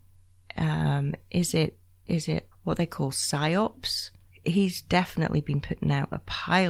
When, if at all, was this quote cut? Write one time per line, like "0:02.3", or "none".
0:02.5
0:04.3